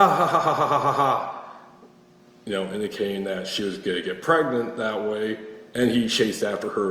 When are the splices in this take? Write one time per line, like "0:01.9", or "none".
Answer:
none